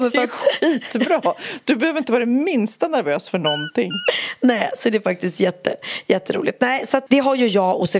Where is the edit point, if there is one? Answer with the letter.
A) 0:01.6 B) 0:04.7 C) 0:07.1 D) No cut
C